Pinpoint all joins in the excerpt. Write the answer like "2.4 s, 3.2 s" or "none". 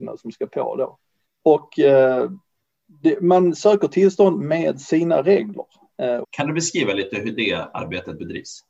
1.3 s, 6.2 s